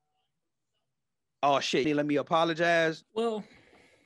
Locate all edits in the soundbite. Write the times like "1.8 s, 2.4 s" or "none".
1.8 s, 3.0 s